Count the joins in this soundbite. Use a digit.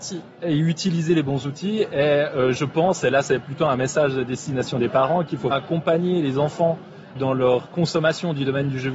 2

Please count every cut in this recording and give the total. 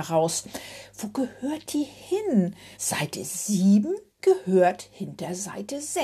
2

